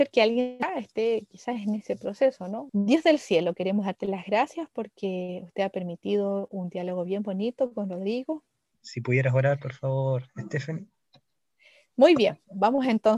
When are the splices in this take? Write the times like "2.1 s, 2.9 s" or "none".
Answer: 2.7 s, 8.7 s